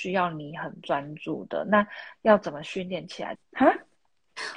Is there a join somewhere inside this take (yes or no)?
yes